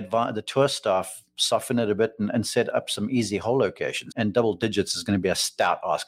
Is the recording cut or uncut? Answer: cut